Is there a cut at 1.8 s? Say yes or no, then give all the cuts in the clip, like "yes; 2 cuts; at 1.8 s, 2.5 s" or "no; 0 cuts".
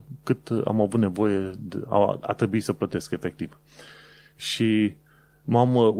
no; 0 cuts